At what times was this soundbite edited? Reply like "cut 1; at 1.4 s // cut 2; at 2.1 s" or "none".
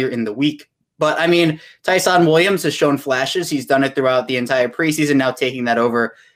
none